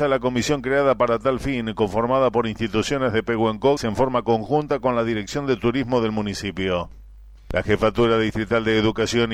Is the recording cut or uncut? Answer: cut